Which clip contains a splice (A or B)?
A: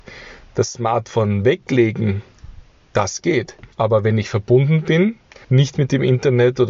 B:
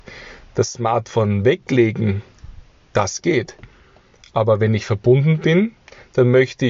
A